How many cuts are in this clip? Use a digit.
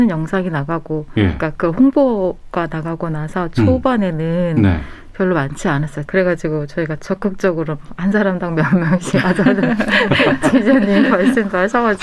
1